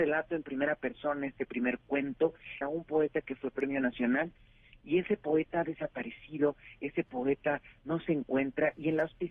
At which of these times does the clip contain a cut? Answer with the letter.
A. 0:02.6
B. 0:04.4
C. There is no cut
A